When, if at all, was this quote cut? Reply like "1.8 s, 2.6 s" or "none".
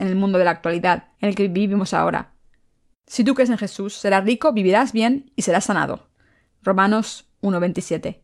1.1 s, 2.9 s, 6.5 s